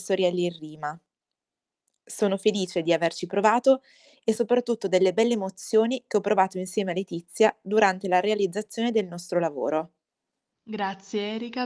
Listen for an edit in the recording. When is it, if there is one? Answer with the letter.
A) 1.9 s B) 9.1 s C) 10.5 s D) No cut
C